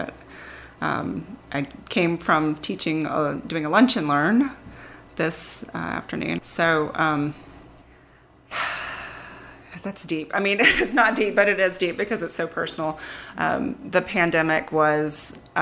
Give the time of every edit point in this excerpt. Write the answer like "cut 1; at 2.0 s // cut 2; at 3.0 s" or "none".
cut 1; at 1.4 s // cut 2; at 6.4 s